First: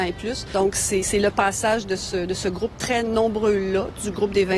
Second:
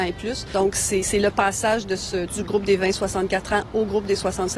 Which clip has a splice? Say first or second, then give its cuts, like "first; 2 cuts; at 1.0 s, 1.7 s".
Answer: second; 1 cut; at 2.3 s